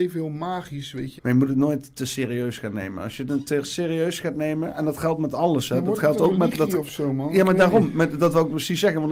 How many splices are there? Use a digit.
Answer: 1